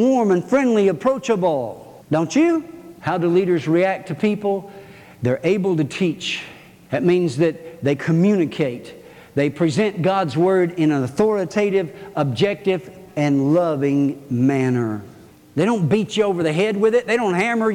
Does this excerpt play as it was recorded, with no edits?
no; 1 cut; at 13.1 s

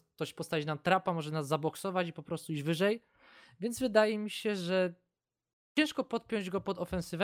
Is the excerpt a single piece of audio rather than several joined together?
yes; 0 cuts

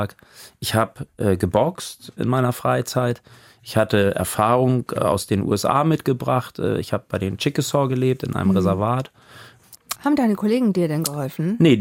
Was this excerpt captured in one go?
no; 2 cuts; at 2.2 s, 10.0 s

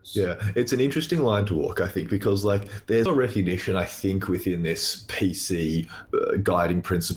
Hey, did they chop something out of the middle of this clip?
yes; 1 cut; at 3.1 s

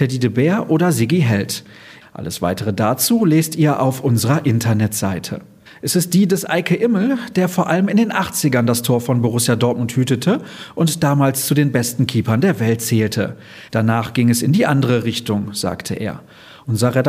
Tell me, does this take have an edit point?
yes; 3 cuts; at 2.0 s, 5.7 s, 13.7 s

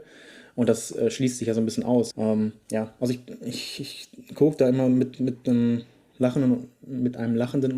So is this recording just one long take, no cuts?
no; 1 cut; at 2.1 s

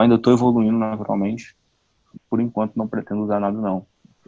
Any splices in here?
yes; 1 cut; at 2.1 s

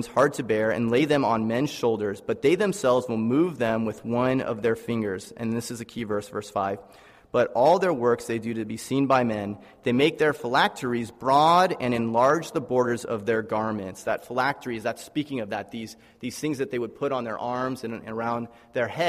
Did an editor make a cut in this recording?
no; 0 cuts

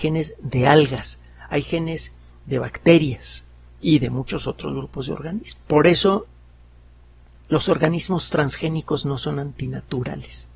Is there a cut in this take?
yes; 1 cut; at 5.6 s

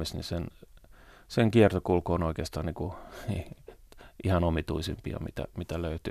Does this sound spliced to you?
no; 0 cuts

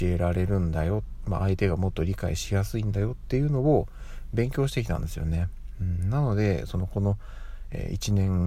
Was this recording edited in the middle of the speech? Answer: no; 0 cuts

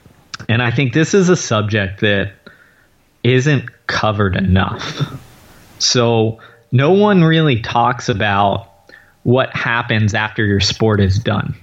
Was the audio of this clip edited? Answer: no; 0 cuts

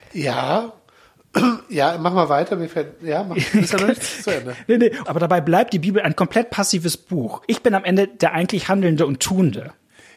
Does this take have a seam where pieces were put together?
yes; 1 cut; at 5.1 s

